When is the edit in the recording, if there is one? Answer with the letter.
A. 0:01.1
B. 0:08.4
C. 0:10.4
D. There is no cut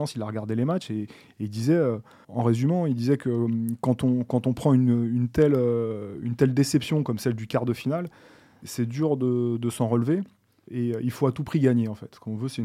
D